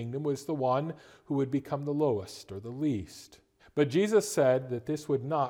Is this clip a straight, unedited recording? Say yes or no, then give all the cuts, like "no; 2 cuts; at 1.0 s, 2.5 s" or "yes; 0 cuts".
no; 1 cut; at 3.6 s